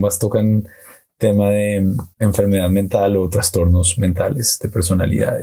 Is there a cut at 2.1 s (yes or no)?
yes